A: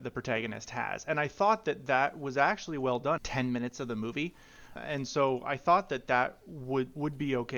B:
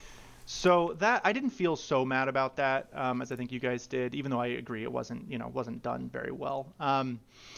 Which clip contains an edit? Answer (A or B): A